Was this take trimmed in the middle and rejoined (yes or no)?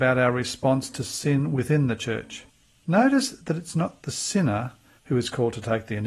yes